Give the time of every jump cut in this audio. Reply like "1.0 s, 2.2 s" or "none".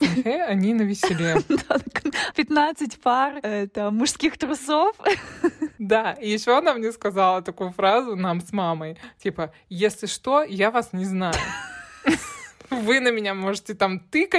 2.3 s